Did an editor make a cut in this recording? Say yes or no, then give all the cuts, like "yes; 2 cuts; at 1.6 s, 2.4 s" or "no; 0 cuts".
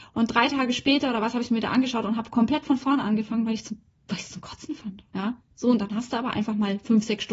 yes; 1 cut; at 5.1 s